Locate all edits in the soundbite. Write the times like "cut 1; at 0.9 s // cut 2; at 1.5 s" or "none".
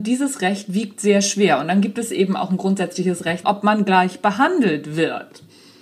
cut 1; at 3.4 s